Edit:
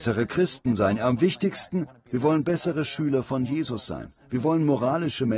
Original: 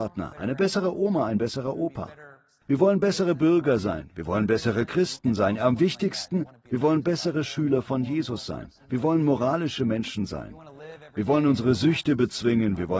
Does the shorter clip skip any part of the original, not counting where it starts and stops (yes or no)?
no